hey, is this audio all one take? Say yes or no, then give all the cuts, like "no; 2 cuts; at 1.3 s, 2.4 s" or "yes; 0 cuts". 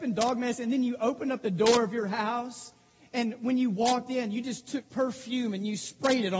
yes; 0 cuts